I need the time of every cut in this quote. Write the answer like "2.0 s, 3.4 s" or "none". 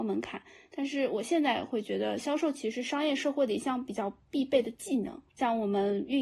5.3 s